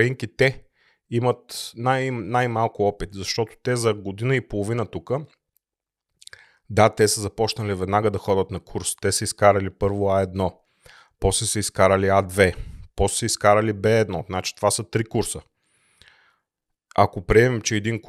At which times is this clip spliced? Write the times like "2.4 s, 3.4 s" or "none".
none